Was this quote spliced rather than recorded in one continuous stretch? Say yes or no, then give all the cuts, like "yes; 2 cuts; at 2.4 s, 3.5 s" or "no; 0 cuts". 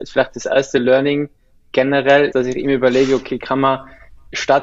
yes; 1 cut; at 2.3 s